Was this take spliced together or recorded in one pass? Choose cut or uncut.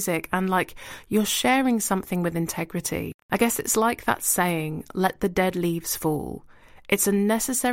uncut